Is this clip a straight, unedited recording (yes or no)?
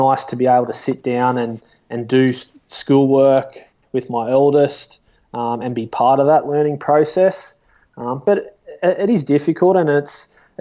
yes